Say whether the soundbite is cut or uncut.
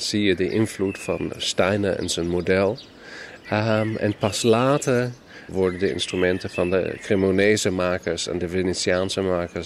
cut